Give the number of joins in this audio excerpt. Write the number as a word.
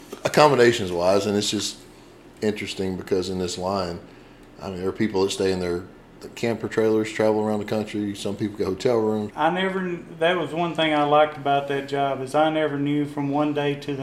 one